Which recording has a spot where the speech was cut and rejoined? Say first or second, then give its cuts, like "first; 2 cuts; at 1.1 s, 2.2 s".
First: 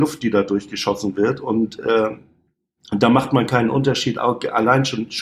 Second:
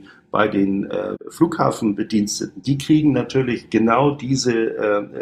second; 2 cuts; at 1.2 s, 2.6 s